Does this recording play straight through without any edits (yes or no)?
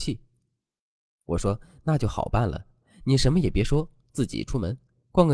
yes